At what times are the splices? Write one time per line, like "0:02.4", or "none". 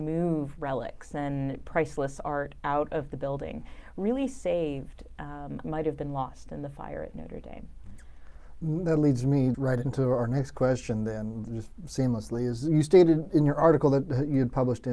0:05.6
0:09.5